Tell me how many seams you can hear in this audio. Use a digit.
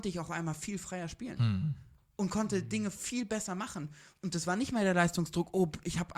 0